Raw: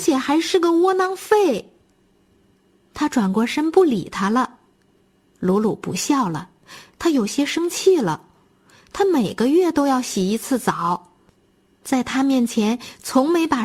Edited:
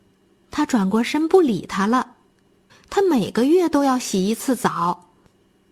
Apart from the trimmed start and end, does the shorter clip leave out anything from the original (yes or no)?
yes